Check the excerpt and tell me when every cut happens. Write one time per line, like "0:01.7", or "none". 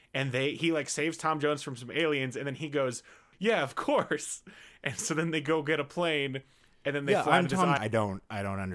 0:03.3
0:07.8